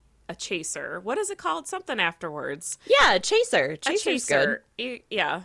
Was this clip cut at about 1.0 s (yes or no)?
no